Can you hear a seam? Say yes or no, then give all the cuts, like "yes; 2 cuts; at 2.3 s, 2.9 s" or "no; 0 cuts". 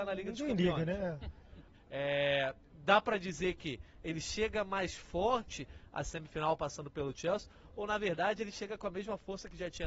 yes; 1 cut; at 1.7 s